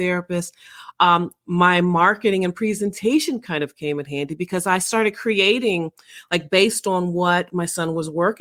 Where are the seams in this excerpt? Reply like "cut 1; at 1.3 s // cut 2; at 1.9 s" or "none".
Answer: none